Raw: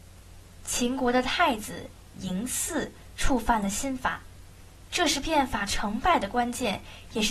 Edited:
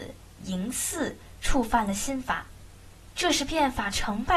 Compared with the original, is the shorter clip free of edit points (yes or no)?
yes